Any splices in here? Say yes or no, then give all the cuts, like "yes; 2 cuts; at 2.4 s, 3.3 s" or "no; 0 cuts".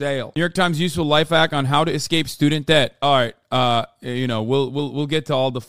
no; 0 cuts